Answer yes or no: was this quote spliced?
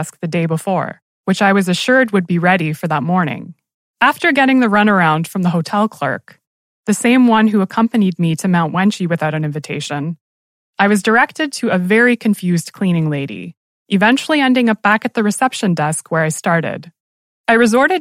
no